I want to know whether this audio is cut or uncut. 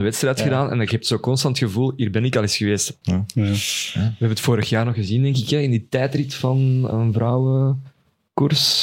cut